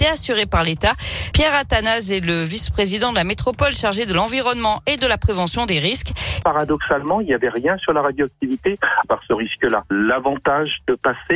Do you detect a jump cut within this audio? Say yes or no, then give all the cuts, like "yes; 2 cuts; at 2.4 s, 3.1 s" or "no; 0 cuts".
yes; 3 cuts; at 1.3 s, 6.4 s, 9.0 s